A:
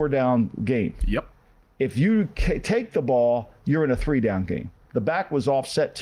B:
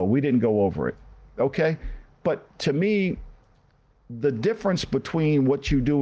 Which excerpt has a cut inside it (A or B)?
A